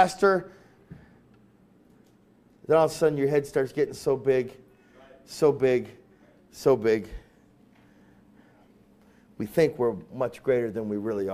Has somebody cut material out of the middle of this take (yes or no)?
no